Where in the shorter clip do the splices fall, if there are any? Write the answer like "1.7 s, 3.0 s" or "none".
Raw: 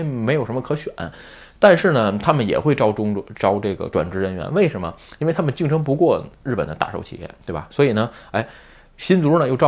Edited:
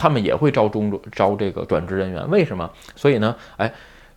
2.9 s